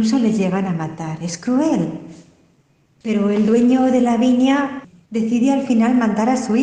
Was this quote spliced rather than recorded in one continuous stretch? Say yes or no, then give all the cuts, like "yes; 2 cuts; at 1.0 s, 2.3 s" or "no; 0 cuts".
no; 0 cuts